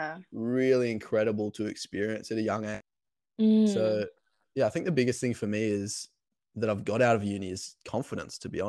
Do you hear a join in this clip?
no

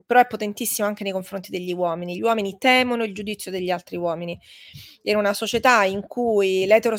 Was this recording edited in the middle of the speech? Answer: no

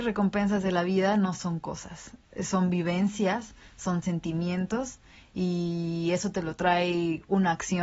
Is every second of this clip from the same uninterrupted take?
yes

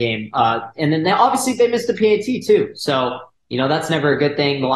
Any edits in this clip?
no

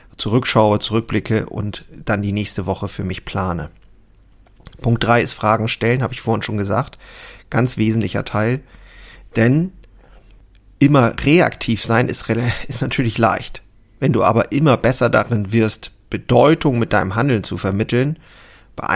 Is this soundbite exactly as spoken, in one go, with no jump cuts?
yes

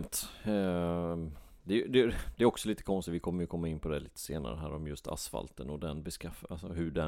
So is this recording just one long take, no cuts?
yes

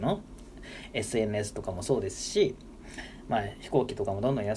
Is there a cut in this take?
no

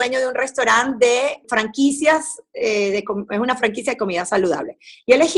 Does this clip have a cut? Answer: yes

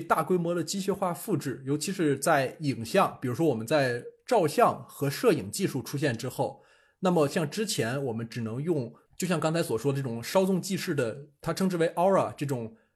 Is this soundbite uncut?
no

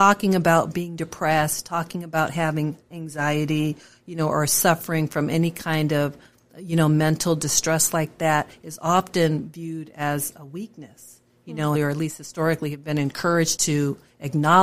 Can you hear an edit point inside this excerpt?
yes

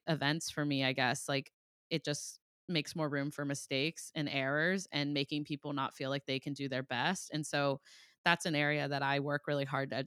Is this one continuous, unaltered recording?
no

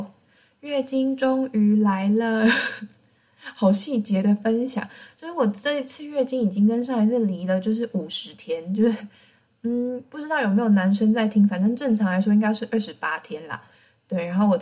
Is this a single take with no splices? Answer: yes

